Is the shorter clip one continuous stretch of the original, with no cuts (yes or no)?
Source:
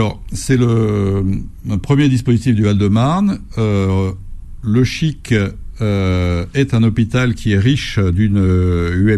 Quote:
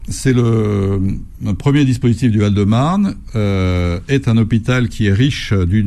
no